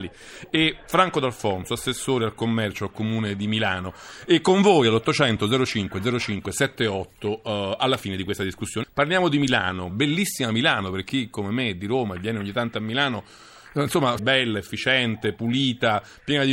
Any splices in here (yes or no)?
yes